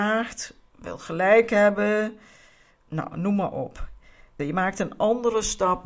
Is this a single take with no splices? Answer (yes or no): no